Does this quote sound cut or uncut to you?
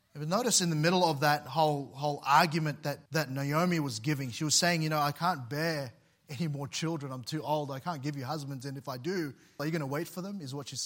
cut